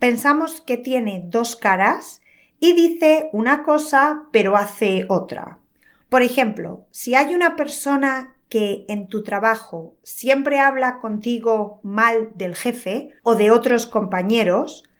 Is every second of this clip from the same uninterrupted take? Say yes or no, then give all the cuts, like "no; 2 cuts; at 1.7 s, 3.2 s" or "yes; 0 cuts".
no; 2 cuts; at 6.0 s, 13.2 s